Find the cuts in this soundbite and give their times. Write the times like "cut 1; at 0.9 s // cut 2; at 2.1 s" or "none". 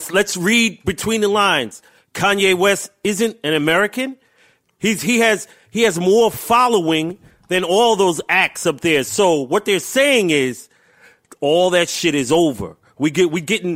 none

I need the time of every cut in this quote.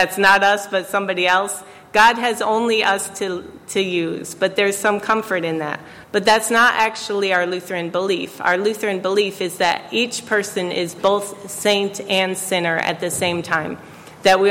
cut 1; at 6.0 s

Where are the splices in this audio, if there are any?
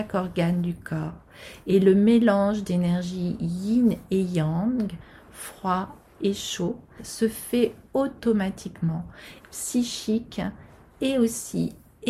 cut 1; at 7.0 s // cut 2; at 9.4 s

